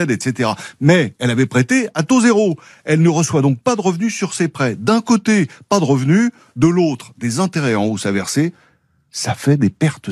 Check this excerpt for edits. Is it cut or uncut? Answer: uncut